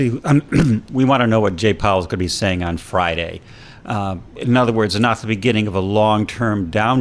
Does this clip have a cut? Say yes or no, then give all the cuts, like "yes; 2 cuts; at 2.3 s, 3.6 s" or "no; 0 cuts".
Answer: yes; 1 cut; at 3.8 s